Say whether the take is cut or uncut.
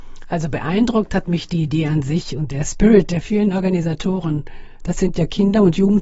cut